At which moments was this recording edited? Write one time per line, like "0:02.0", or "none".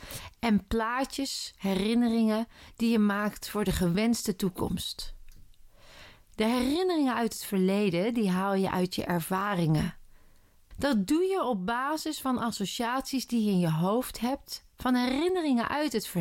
0:10.7